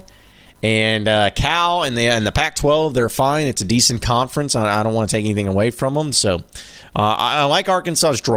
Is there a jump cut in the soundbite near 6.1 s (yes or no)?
yes